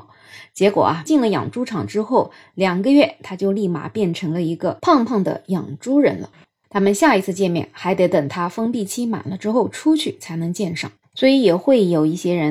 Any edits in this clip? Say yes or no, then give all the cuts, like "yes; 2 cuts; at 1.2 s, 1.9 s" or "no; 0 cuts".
yes; 1 cut; at 6.6 s